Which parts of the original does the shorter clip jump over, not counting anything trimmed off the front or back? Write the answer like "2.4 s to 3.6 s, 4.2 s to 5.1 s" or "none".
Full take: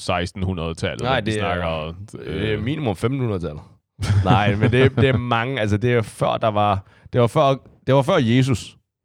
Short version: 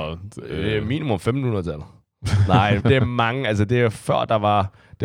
4.6 s to 4.9 s